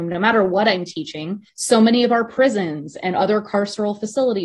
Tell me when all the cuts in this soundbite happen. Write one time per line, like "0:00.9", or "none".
0:01.5